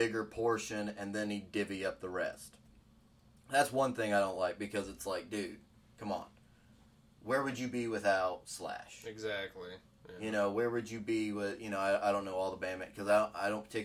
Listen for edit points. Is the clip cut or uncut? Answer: uncut